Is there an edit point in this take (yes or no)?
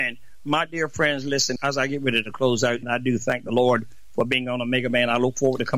yes